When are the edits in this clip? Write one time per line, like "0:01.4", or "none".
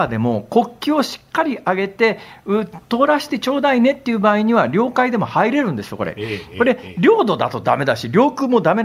none